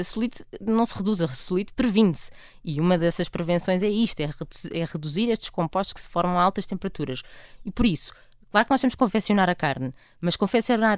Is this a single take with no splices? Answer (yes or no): yes